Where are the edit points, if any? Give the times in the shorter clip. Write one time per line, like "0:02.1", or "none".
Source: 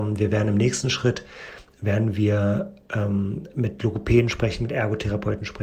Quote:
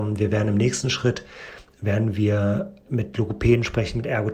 0:02.9